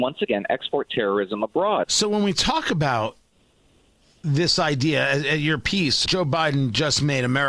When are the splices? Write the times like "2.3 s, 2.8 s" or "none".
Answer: 1.8 s, 6.1 s